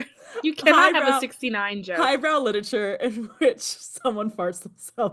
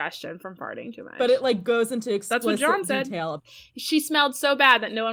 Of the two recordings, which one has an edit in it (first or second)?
second